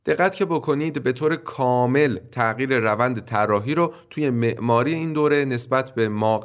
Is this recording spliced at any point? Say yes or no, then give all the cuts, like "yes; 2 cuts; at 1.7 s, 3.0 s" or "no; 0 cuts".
no; 0 cuts